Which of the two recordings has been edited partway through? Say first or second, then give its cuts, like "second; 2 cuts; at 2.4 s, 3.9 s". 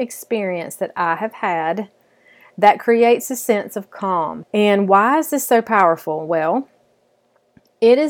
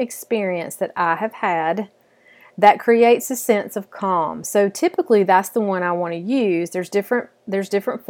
first; 1 cut; at 4.4 s